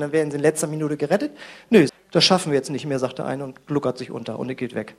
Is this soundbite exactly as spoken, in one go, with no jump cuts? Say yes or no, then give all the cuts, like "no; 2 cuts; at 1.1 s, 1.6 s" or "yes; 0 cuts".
no; 1 cut; at 1.9 s